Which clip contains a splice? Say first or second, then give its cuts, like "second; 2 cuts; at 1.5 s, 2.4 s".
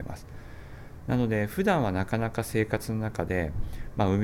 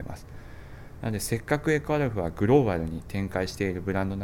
second; 1 cut; at 1.0 s